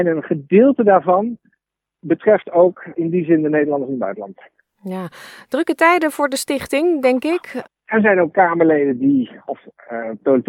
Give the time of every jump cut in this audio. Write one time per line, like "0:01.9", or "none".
0:07.7